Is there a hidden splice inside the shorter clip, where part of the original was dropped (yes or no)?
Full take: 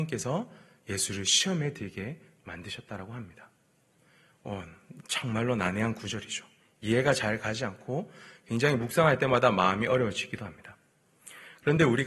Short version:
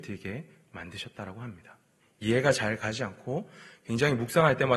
yes